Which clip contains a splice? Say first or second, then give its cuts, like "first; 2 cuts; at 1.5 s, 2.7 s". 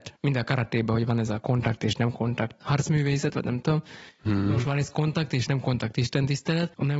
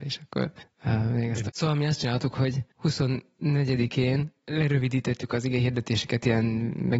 second; 1 cut; at 1.5 s